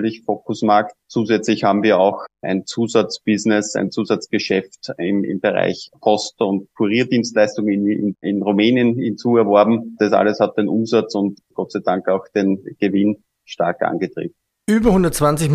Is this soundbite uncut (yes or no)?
yes